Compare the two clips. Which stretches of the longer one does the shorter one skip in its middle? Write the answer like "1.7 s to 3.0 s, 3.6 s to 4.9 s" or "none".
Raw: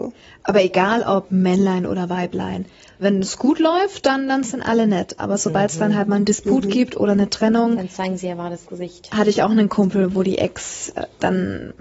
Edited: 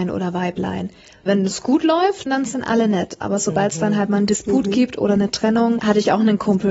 4.0 s to 4.2 s, 7.8 s to 9.1 s